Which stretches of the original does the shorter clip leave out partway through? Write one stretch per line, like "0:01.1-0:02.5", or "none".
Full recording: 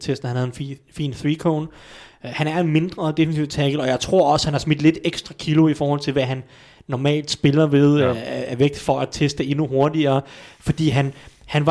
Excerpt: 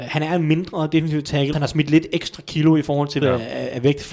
0:03.8-0:04.4
0:06.1-0:08.0